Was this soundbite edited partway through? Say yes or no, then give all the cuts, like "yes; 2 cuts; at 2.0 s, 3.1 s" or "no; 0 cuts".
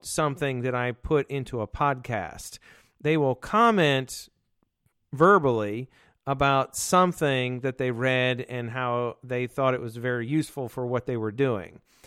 no; 0 cuts